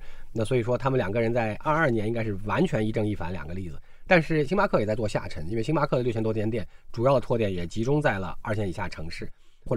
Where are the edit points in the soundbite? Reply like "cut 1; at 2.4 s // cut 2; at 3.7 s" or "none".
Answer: none